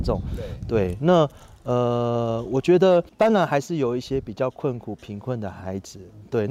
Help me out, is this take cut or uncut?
uncut